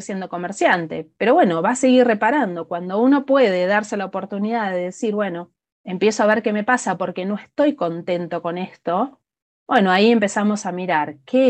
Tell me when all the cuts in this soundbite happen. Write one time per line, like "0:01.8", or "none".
none